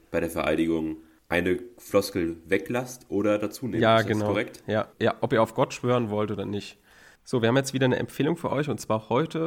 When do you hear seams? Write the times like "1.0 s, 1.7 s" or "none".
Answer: 4.9 s, 7.2 s

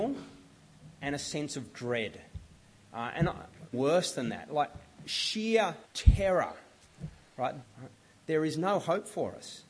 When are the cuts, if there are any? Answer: 3.7 s, 5.8 s, 7.6 s

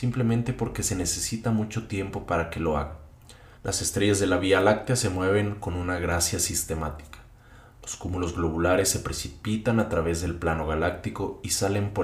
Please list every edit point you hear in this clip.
3.6 s

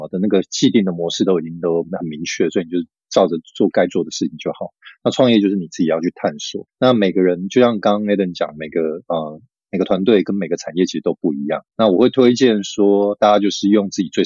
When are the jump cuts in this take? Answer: none

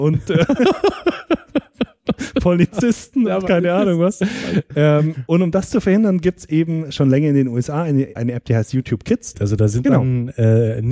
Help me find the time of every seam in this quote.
8.2 s, 9.3 s

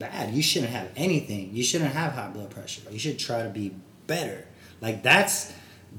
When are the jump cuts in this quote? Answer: 2.9 s

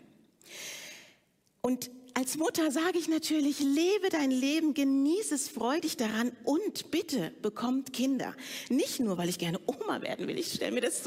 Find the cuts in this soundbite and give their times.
none

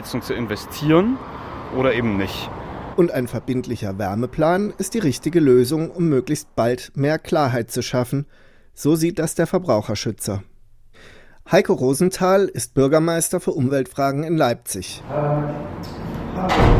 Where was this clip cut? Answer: 2.9 s

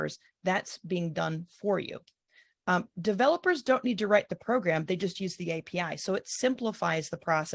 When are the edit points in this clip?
none

